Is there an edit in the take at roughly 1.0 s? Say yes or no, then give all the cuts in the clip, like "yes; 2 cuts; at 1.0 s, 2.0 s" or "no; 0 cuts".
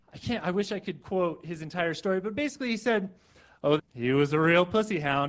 yes; 2 cuts; at 1.0 s, 3.8 s